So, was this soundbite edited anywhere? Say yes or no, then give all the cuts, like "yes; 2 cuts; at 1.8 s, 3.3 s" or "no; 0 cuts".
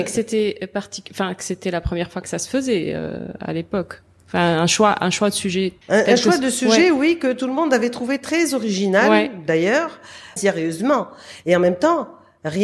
yes; 2 cuts; at 5.8 s, 10.4 s